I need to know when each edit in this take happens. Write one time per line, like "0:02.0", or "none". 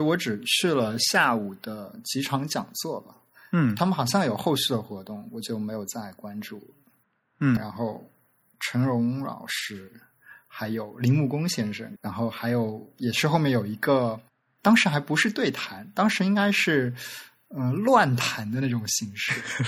0:07.6
0:12.0